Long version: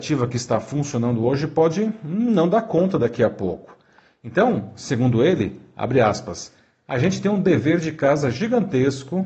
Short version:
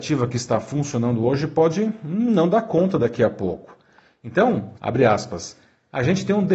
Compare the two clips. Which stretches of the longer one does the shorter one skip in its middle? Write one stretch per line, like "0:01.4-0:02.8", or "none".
0:04.8-0:05.7